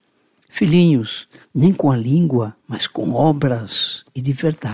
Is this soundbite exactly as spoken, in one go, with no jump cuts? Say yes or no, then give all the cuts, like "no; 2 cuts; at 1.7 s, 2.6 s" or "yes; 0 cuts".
no; 2 cuts; at 1.4 s, 2.6 s